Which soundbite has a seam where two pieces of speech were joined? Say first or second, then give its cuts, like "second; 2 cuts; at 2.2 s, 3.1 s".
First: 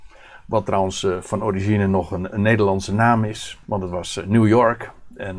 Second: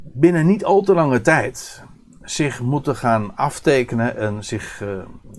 first; 1 cut; at 3.6 s